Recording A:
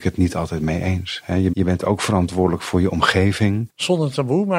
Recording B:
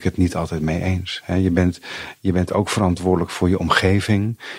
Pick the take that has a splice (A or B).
A